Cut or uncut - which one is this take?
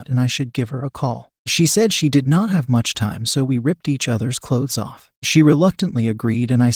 cut